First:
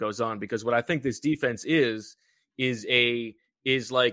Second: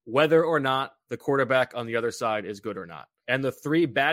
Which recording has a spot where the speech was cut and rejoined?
second; 1 cut; at 3.2 s

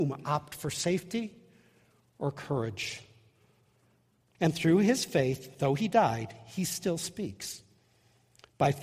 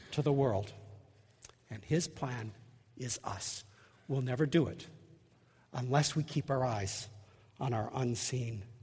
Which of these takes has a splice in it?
first; 1 cut; at 4.3 s

